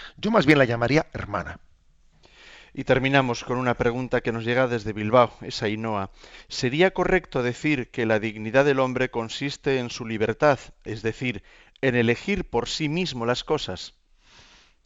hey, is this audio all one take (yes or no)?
yes